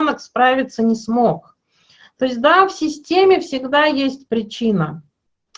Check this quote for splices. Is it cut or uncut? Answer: uncut